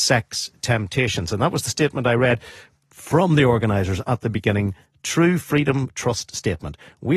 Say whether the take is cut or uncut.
uncut